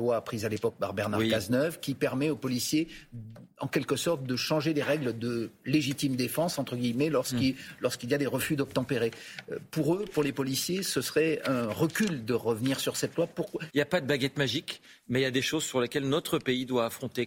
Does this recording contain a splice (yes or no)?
yes